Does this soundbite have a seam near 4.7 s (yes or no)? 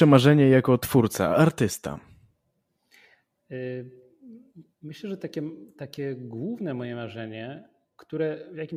yes